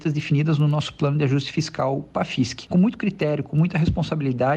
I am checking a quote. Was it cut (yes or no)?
no